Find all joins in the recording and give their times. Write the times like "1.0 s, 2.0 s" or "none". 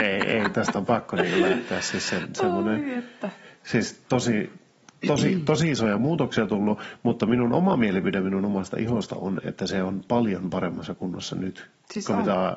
none